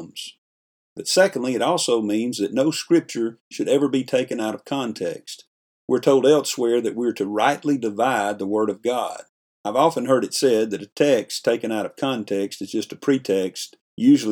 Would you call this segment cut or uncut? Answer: uncut